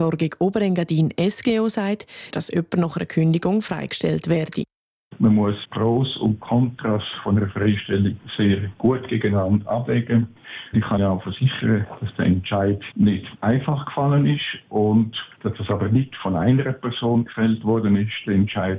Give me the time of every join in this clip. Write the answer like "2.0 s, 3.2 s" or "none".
2.3 s